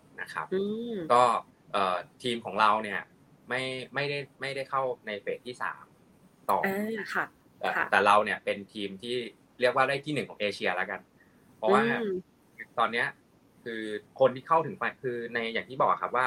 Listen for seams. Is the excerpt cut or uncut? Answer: uncut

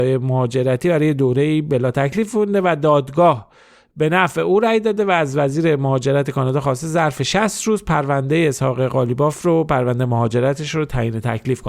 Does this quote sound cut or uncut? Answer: uncut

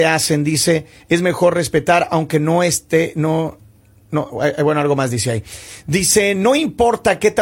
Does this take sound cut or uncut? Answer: uncut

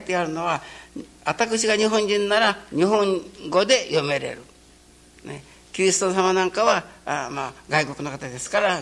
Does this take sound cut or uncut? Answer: uncut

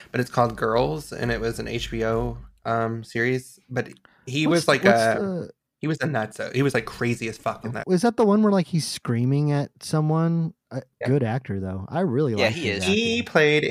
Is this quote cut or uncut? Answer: cut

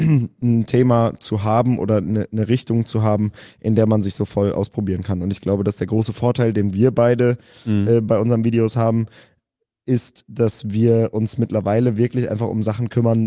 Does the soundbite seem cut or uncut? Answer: uncut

